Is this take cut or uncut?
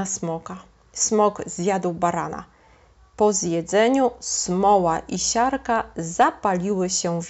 uncut